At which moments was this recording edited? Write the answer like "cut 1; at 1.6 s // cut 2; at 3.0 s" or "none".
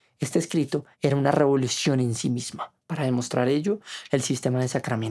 cut 1; at 0.9 s // cut 2; at 4.1 s